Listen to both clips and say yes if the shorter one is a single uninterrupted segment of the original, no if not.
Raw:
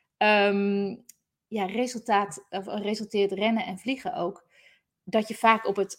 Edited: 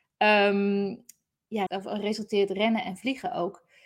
no